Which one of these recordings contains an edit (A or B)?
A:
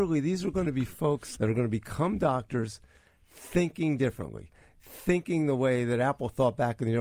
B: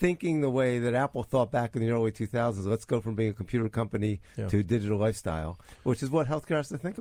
A